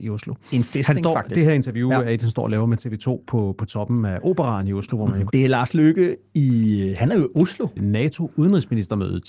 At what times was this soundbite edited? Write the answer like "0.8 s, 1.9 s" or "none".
5.3 s, 7.8 s